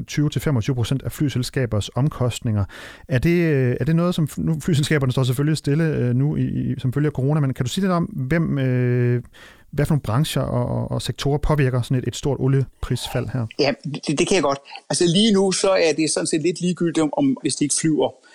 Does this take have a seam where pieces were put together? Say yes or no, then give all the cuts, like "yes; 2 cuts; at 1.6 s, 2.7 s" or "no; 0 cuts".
yes; 2 cuts; at 14.8 s, 17.4 s